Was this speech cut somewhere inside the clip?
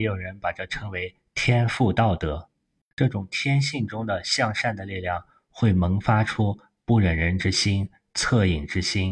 no; 0 cuts

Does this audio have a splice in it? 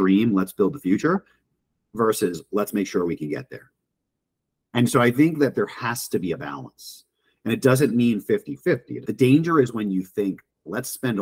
no; 0 cuts

